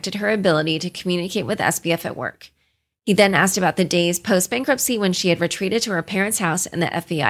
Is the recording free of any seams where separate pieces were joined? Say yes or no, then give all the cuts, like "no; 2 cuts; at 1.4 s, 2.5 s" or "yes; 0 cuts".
yes; 0 cuts